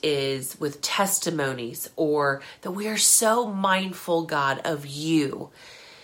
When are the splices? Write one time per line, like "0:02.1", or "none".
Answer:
none